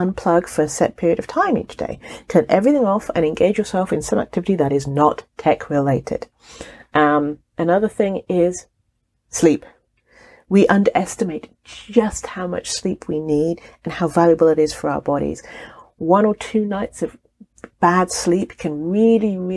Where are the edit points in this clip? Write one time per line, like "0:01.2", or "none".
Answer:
none